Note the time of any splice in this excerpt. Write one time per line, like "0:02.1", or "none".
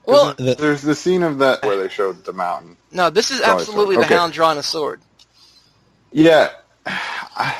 0:01.6